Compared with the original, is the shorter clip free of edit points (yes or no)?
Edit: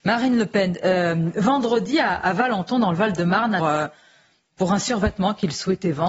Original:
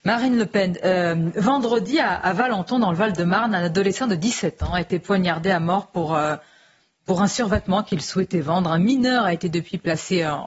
no